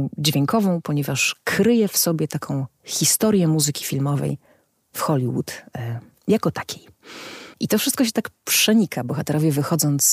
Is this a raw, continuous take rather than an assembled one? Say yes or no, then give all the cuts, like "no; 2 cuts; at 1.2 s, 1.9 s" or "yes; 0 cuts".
no; 1 cut; at 7.5 s